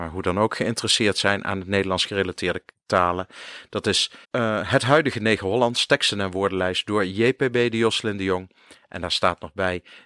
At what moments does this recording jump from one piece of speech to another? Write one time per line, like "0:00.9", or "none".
0:04.2

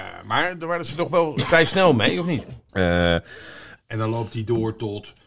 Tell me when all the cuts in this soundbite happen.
0:02.7
0:03.8

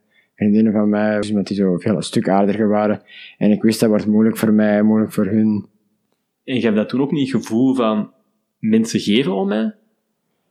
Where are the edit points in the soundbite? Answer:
0:01.2

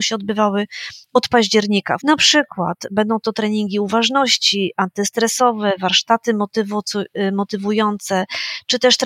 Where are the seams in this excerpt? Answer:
0:02.0

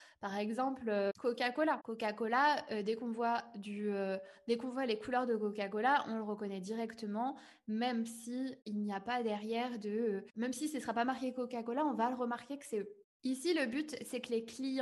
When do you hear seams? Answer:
none

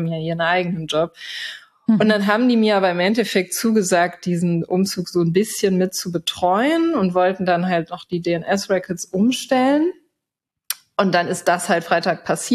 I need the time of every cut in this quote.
none

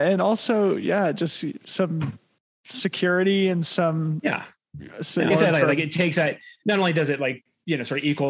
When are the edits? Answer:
0:05.3

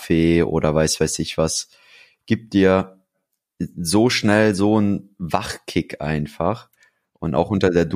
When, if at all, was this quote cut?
none

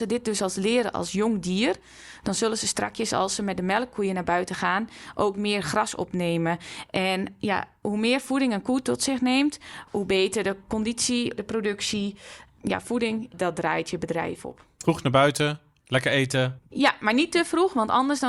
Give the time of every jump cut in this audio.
0:11.4

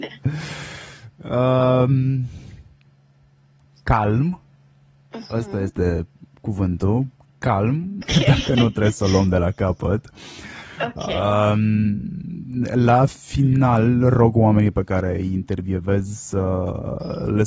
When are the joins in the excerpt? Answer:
0:08.0

